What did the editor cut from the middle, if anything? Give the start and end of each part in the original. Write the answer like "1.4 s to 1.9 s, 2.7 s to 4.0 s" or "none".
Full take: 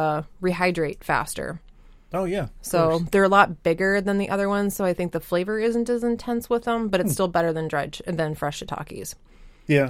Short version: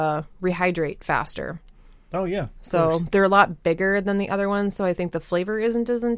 none

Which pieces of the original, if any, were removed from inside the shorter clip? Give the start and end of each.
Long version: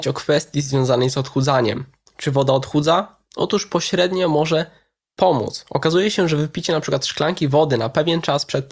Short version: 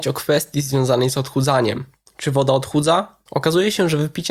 3.3 s to 5.6 s

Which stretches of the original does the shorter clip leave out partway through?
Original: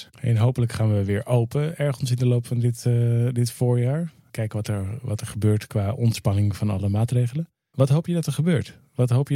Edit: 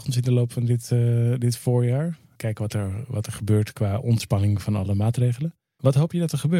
none

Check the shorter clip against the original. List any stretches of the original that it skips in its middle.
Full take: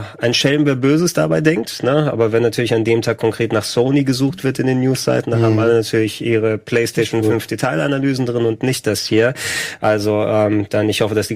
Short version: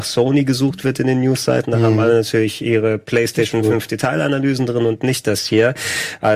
none

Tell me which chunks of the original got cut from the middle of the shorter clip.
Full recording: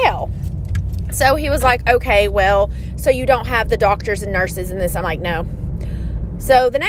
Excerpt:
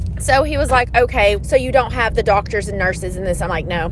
2.3 s to 2.9 s

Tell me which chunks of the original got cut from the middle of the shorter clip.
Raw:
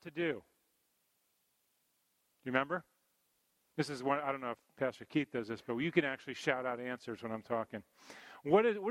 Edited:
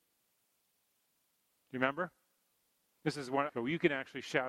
4.2 s to 5.6 s

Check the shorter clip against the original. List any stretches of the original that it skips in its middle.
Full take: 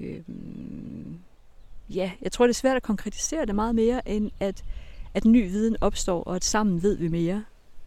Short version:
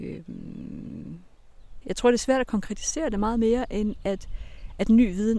1.8 s to 2.2 s

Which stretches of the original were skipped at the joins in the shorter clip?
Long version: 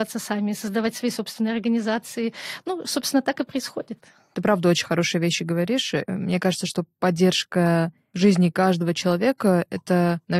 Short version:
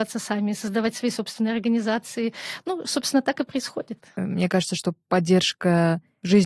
4.1 s to 6.0 s

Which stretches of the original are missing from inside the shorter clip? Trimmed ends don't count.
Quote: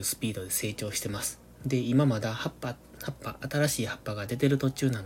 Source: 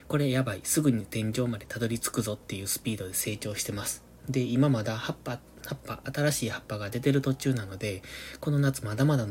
none

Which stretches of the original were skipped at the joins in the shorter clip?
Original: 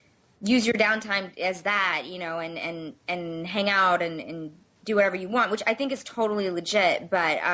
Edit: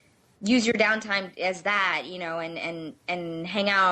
none

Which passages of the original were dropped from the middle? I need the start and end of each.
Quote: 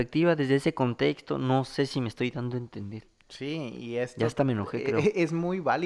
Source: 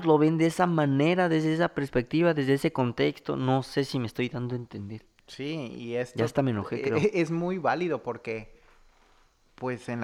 none

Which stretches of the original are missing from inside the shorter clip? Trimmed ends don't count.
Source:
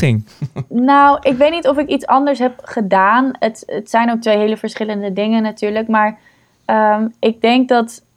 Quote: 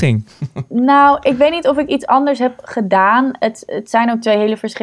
none

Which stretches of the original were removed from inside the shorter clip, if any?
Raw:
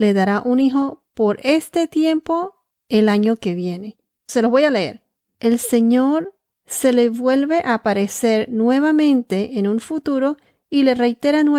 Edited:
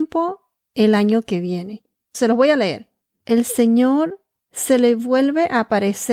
none

